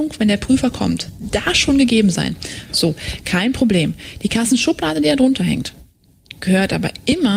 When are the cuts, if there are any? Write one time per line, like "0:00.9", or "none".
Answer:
0:02.7